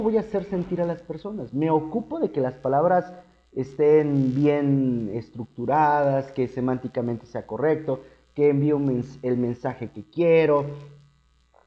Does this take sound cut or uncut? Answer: uncut